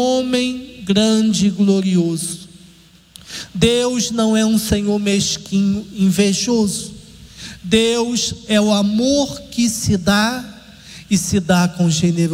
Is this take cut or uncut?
uncut